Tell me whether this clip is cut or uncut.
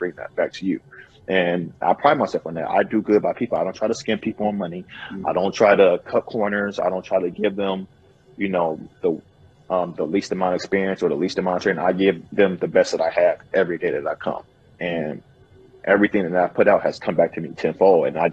uncut